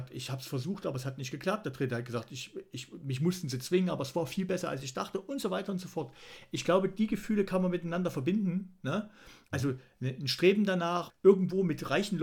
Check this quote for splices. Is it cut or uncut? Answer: cut